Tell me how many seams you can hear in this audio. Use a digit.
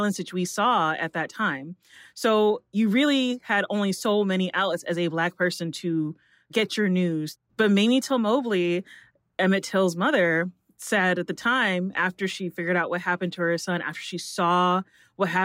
1